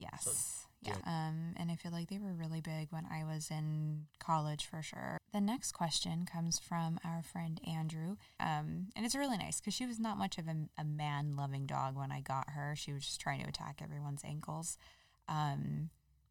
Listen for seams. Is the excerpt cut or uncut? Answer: cut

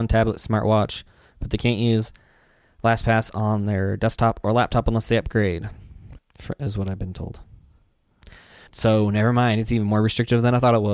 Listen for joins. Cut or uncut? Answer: cut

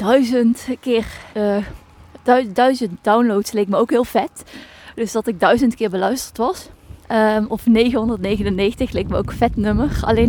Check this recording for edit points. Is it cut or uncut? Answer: cut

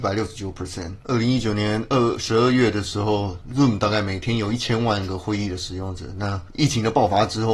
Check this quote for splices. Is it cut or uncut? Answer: cut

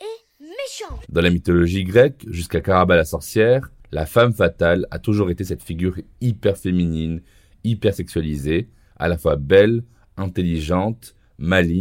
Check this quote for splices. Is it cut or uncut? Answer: cut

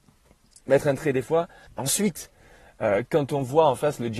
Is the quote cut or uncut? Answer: cut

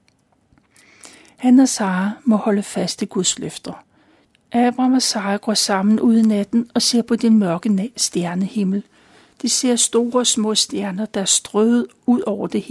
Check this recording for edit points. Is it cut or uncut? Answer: cut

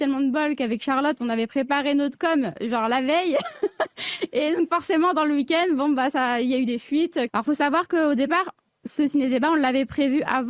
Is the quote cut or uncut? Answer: cut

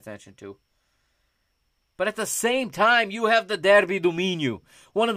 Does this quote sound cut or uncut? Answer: uncut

